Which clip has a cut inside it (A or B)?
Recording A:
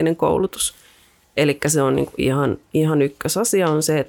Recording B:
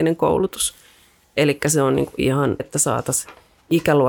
B